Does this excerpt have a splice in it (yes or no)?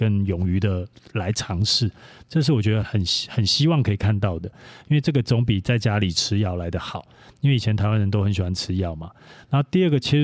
yes